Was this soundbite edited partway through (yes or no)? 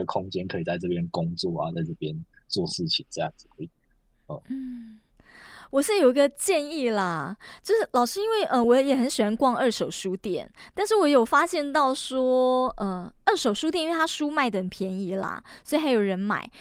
no